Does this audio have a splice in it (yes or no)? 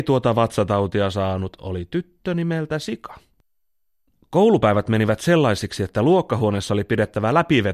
no